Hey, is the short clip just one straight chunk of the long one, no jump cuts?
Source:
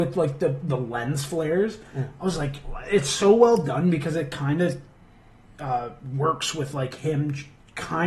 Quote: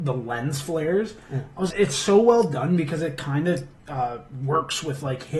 no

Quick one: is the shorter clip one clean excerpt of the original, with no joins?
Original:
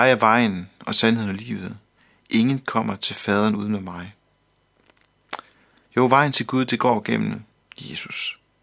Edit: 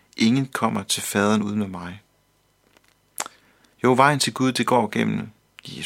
yes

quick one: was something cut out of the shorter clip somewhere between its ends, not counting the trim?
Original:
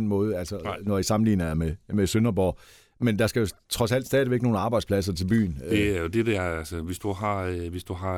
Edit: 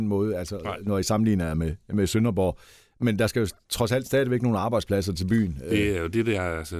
no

